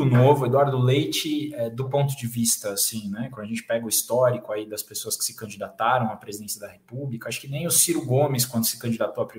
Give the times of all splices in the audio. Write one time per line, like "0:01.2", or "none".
none

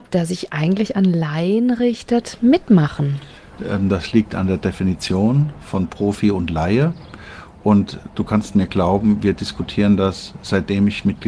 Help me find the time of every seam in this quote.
none

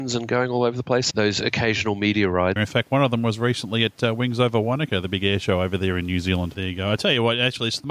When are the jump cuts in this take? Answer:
0:01.1
0:02.6
0:06.5

